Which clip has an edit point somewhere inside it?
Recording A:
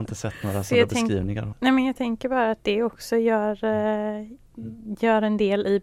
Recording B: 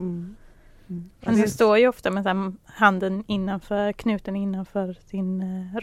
A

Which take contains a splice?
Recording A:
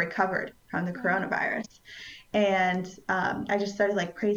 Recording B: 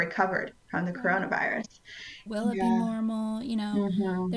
B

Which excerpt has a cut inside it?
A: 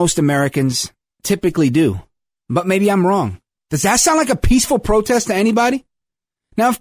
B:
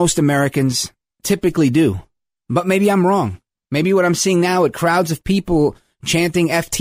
A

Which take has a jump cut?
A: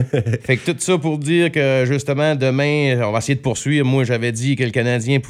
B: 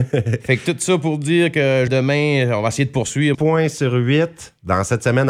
B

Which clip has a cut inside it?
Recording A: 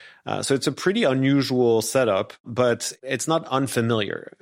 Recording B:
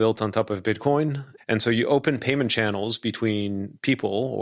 B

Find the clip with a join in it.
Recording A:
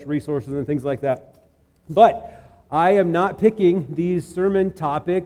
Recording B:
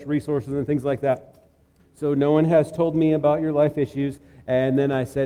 B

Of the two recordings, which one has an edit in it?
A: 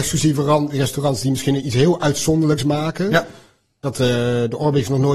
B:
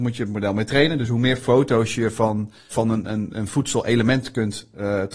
B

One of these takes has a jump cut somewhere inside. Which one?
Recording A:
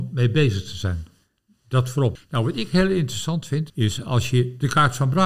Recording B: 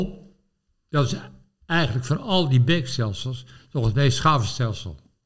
A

